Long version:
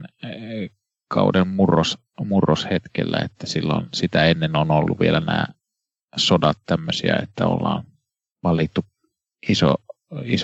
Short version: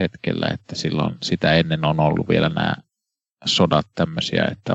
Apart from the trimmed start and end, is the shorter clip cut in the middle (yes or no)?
no